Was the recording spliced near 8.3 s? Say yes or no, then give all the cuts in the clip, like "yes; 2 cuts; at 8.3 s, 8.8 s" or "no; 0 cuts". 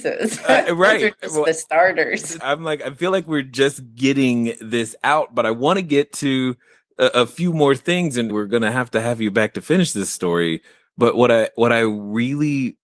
yes; 2 cuts; at 2.4 s, 8.3 s